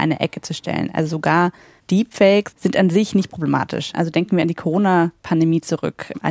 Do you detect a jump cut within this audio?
yes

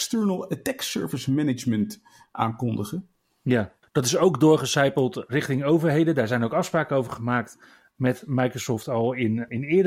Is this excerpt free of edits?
no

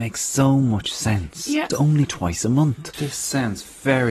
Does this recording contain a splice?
yes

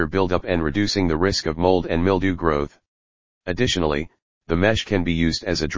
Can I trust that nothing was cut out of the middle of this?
no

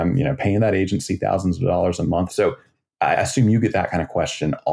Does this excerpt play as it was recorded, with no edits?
no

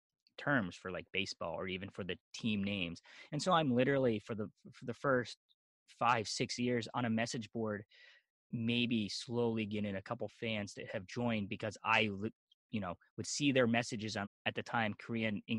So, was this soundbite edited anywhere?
yes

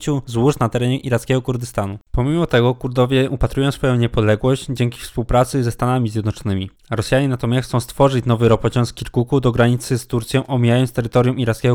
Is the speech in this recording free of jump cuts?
yes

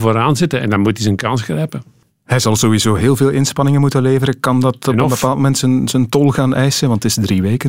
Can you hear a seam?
no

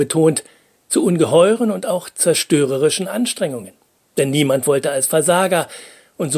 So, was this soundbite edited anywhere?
no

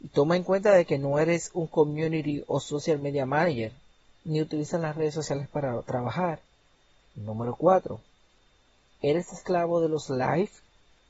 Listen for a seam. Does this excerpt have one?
yes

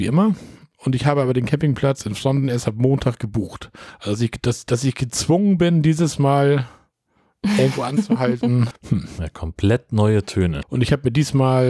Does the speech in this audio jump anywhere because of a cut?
yes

